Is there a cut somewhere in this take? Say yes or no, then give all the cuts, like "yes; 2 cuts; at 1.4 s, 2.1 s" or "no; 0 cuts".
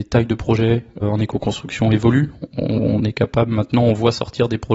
yes; 1 cut; at 1.0 s